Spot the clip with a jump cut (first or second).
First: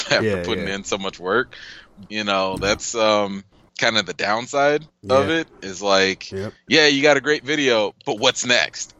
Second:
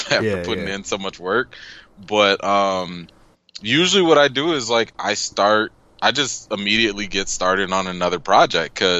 first